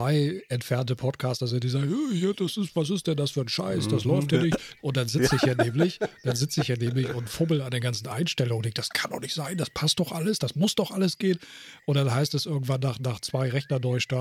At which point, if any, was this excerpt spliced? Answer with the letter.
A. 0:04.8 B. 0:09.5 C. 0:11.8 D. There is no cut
A